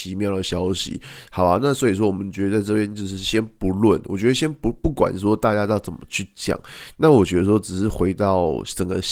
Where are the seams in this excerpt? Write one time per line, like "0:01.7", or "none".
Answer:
none